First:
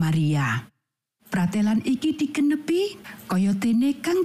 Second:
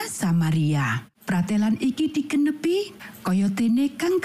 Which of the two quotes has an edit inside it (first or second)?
second